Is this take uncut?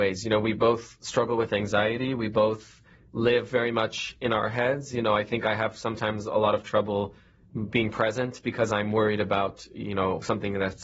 yes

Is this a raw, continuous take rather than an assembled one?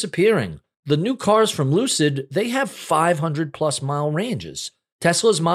yes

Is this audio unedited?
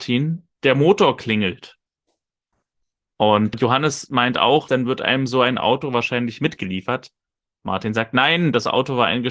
no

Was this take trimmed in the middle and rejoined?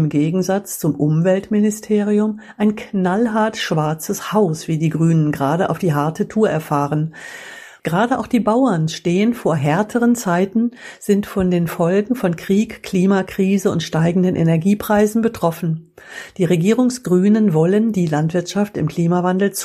yes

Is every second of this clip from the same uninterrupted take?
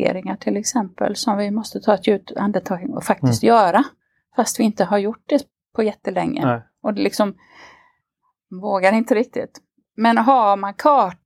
yes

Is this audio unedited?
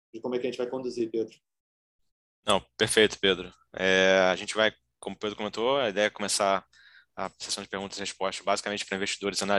yes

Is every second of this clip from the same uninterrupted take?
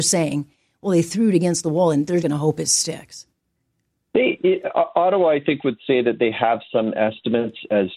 no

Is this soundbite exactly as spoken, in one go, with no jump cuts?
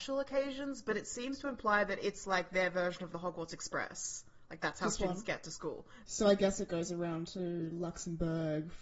no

